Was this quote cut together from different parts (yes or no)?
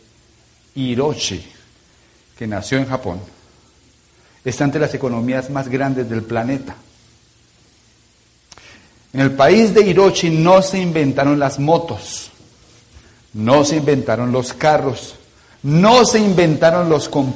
no